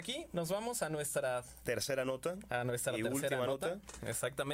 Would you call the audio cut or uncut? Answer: uncut